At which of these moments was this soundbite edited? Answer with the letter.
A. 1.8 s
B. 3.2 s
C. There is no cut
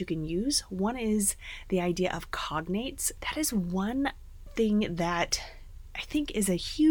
B